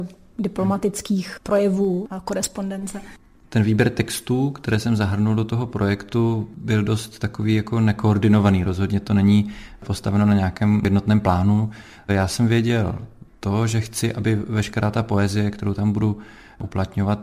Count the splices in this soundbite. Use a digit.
0